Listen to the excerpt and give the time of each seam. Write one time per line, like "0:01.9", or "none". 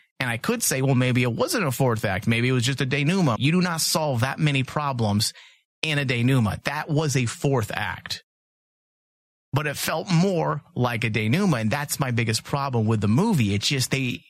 0:03.4